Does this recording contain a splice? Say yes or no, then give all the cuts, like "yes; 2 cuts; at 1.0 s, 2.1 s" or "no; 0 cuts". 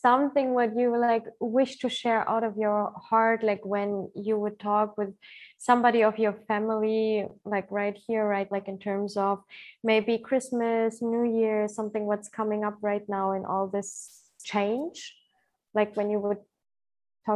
yes; 1 cut; at 8.5 s